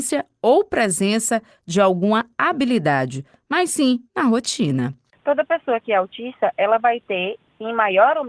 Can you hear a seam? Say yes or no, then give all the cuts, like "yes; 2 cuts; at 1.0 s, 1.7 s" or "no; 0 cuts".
yes; 1 cut; at 4.1 s